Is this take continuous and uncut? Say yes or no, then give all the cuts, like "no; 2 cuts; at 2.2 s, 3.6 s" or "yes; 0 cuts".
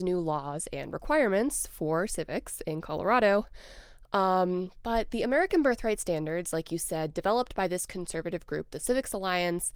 yes; 0 cuts